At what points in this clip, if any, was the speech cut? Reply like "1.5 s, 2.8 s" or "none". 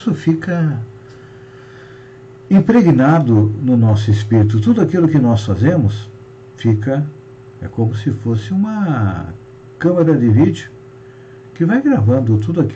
none